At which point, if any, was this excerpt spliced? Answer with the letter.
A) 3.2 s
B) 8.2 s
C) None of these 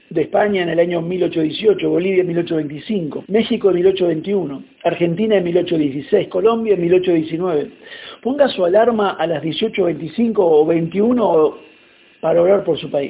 A